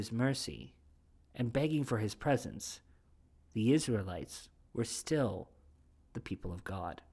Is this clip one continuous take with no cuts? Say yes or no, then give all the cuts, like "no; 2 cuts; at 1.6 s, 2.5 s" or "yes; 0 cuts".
yes; 0 cuts